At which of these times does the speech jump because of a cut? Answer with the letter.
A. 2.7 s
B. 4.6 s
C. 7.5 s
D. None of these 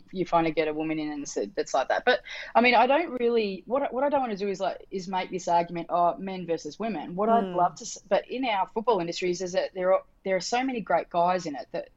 D